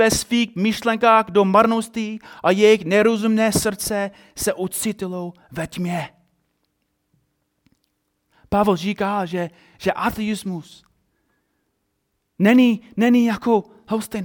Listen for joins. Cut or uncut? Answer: uncut